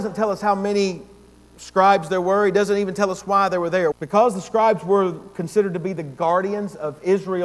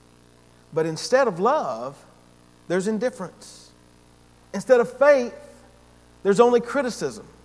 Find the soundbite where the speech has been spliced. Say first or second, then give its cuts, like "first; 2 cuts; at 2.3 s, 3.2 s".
first; 1 cut; at 3.9 s